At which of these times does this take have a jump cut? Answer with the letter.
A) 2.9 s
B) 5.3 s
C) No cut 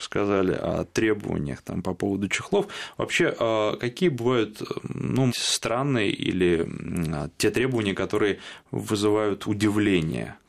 B